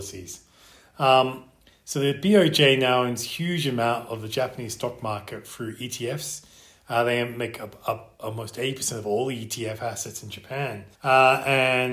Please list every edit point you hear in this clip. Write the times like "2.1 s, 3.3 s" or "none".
10.9 s